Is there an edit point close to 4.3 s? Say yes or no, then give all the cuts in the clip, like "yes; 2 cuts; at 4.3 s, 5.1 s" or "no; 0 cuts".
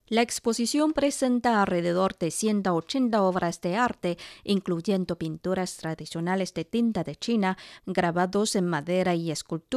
no; 1 cut; at 7.8 s